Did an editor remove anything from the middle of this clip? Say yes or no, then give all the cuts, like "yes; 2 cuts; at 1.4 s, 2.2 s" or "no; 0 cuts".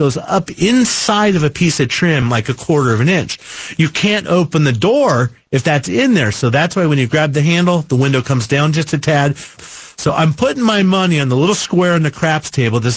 yes; 1 cut; at 9.6 s